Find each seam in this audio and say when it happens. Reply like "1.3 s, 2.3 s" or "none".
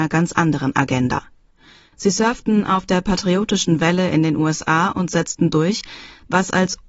none